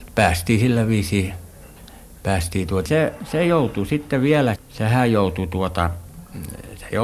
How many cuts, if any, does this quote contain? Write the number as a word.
two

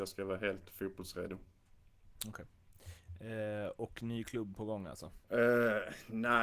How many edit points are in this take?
one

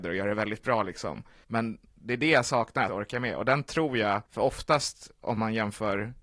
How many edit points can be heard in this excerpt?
three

